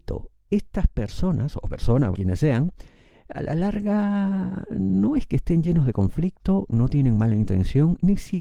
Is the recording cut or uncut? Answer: cut